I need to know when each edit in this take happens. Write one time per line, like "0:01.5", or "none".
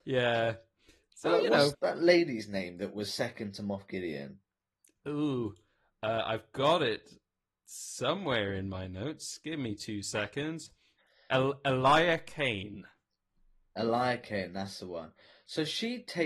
0:01.7